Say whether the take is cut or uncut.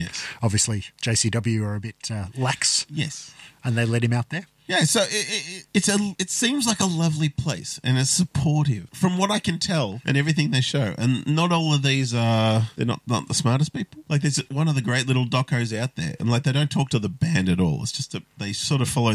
uncut